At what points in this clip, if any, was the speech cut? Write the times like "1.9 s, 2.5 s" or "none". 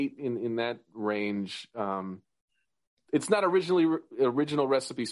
none